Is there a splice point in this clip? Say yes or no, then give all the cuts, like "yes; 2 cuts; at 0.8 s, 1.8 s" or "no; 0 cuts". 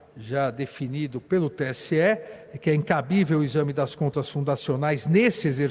no; 0 cuts